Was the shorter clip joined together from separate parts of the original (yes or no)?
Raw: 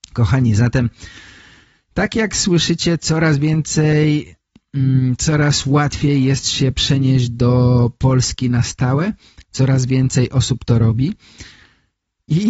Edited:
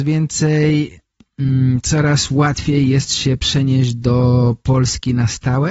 no